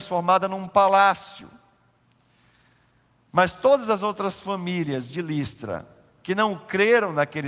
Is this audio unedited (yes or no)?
yes